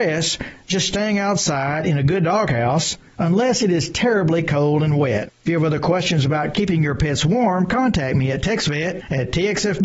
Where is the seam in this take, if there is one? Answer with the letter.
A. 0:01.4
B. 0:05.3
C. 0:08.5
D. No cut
D